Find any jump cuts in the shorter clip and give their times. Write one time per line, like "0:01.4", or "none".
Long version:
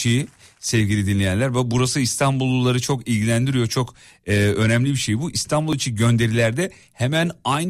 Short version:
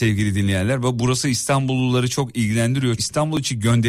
0:03.0